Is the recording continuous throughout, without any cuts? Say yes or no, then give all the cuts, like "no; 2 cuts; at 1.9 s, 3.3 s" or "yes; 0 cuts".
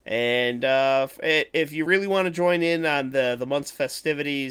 yes; 0 cuts